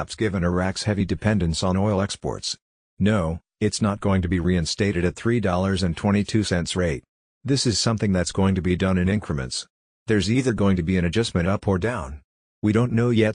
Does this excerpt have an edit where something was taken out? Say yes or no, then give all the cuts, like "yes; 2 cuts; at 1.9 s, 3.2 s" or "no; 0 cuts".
yes; 1 cut; at 2.9 s